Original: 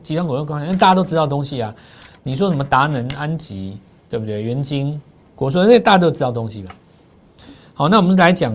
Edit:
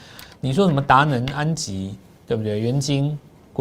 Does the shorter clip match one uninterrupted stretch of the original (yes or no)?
yes